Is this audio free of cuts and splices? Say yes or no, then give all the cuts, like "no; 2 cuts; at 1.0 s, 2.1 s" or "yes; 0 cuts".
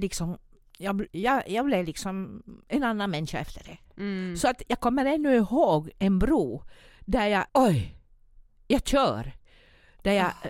no; 3 cuts; at 1.1 s, 3.9 s, 7.5 s